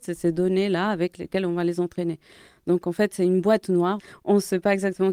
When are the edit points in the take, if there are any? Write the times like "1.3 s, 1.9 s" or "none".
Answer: 4.0 s